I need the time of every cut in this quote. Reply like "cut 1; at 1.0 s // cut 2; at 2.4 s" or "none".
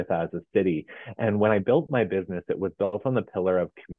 none